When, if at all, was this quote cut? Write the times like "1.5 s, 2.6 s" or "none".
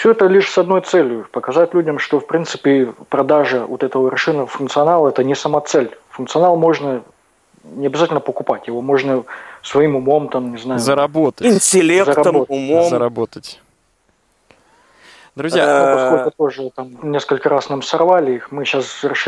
none